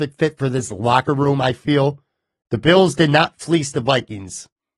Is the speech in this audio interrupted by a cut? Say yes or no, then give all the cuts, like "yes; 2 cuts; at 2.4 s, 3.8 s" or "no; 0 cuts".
yes; 1 cut; at 2.4 s